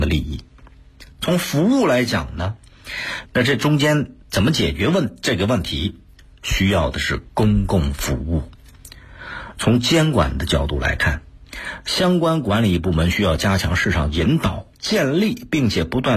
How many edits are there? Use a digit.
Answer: 3